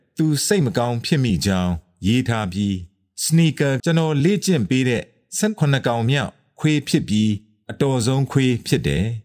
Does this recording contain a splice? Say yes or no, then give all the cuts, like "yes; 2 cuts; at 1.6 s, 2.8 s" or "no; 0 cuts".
yes; 1 cut; at 3.8 s